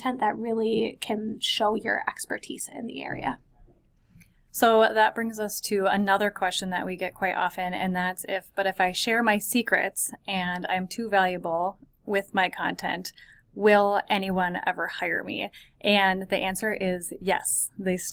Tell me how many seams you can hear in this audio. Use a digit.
0